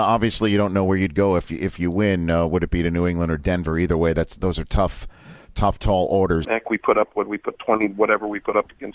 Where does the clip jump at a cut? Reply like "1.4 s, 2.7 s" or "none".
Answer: 4.4 s, 6.4 s